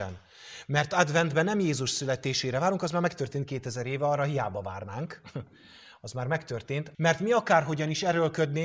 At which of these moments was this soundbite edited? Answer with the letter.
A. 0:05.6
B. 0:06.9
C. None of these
B